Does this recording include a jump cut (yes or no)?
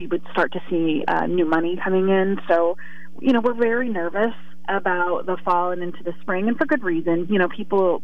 no